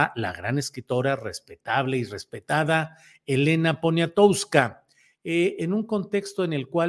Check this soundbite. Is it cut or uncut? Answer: uncut